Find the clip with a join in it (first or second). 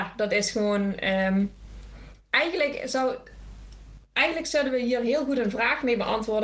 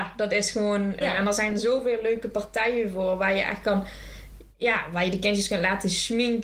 second